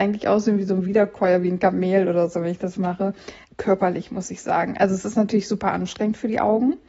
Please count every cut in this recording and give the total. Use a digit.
1